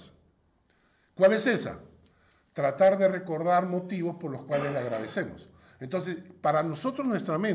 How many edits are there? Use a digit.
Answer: 1